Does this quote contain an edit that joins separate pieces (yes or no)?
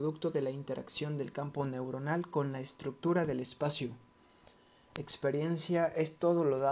no